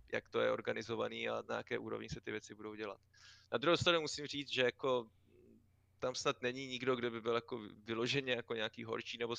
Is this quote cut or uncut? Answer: uncut